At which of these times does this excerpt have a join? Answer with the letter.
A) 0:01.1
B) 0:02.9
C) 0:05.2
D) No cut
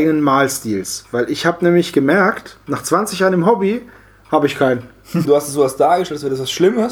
C